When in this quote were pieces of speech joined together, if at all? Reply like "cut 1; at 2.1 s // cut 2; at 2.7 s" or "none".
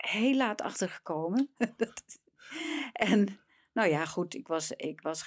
cut 1; at 1.6 s